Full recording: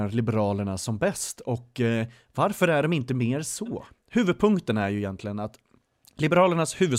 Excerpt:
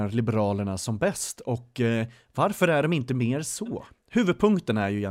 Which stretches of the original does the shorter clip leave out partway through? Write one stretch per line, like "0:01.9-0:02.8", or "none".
none